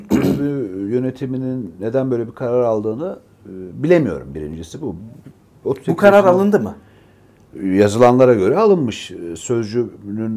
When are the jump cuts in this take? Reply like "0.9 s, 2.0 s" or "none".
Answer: none